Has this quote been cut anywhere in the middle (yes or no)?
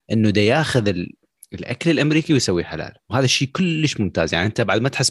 no